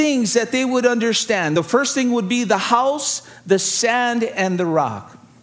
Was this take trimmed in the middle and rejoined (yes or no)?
no